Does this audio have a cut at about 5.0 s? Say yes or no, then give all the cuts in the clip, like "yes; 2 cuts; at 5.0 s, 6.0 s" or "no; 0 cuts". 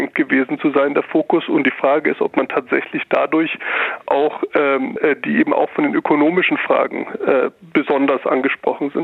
yes; 1 cut; at 5.0 s